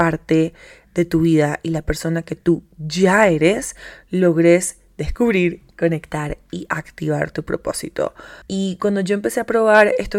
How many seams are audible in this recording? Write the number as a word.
one